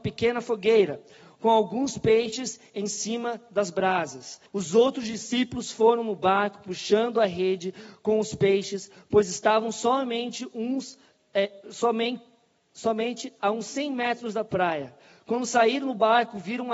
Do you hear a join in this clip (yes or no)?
yes